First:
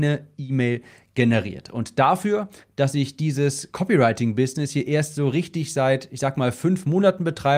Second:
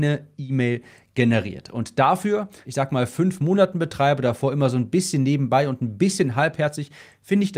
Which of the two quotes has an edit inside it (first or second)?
second